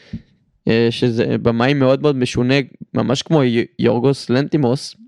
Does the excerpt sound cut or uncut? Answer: uncut